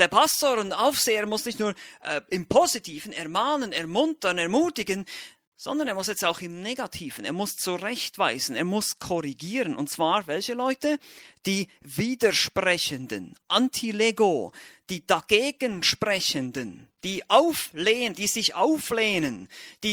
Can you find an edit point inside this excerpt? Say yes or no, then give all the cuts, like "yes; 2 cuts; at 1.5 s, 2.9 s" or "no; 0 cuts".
no; 0 cuts